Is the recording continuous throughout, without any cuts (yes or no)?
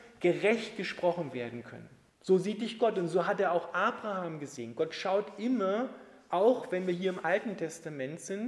no